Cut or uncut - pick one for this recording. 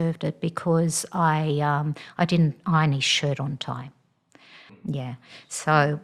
cut